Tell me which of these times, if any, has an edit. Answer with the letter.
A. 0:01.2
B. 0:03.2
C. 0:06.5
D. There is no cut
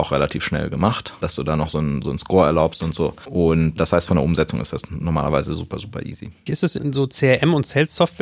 C